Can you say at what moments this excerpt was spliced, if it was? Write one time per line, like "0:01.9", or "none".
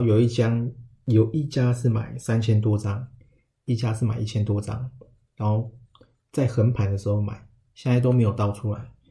none